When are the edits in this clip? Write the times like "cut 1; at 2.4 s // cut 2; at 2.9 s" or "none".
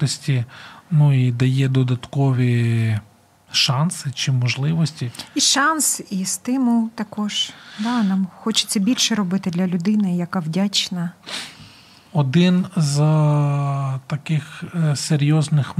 none